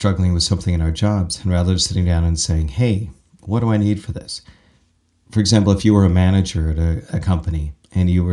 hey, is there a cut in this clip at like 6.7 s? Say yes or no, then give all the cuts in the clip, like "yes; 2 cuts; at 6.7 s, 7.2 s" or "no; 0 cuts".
no; 0 cuts